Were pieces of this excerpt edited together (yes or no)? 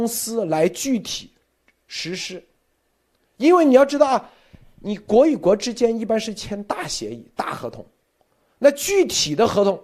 no